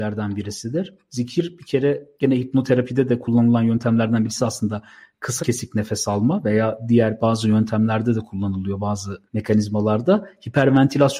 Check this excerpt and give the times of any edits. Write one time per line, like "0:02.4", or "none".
0:05.4
0:09.3

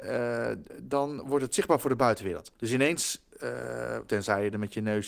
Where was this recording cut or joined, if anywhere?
0:02.6
0:04.1

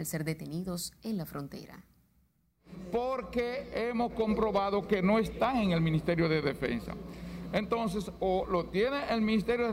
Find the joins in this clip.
none

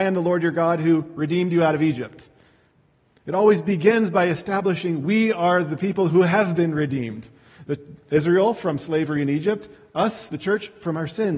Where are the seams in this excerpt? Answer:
none

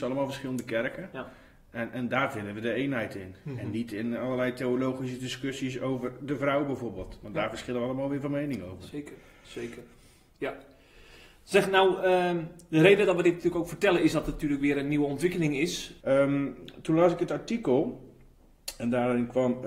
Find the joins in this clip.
0:16.0

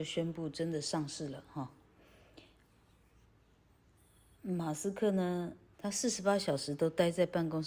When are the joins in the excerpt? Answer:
0:05.7

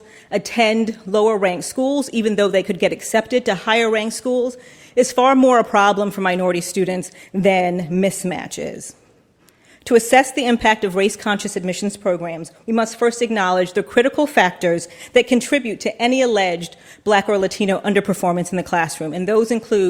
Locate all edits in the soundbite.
none

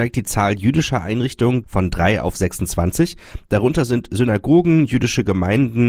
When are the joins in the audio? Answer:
0:01.6

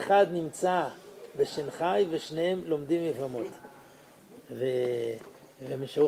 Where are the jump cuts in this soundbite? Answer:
0:04.4

